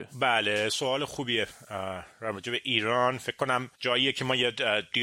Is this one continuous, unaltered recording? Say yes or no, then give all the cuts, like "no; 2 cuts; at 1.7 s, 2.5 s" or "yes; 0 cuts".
no; 1 cut; at 3.7 s